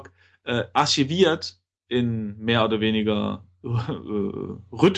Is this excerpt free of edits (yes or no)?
yes